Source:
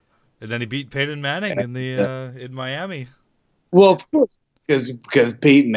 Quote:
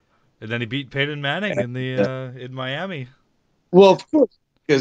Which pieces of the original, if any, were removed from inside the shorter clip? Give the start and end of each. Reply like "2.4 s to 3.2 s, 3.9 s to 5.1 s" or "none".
none